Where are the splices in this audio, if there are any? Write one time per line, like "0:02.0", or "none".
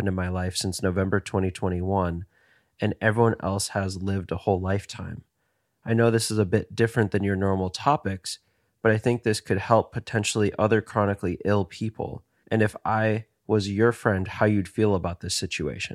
0:12.4